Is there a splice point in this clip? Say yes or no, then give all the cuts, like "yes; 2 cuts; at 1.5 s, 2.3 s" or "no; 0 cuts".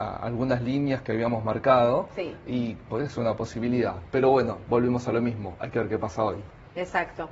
no; 0 cuts